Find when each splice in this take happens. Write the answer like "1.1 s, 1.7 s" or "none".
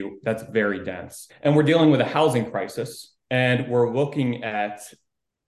1.3 s, 3.2 s